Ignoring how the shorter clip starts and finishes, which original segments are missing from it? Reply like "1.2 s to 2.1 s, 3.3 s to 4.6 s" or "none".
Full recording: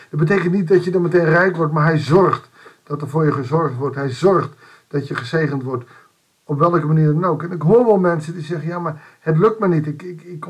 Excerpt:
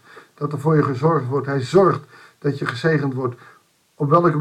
none